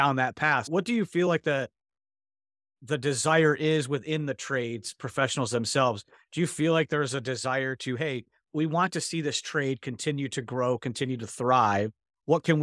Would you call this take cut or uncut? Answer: uncut